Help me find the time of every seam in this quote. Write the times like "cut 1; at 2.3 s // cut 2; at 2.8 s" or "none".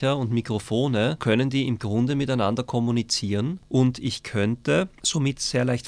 cut 1; at 1.2 s